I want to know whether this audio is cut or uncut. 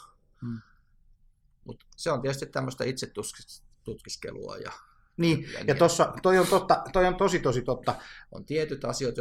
cut